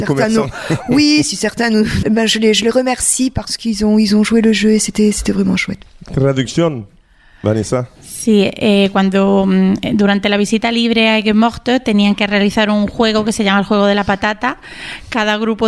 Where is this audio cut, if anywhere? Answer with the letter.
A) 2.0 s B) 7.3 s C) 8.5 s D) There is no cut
A